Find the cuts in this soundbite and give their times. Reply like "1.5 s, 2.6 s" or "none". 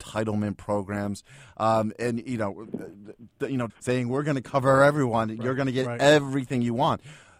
3.7 s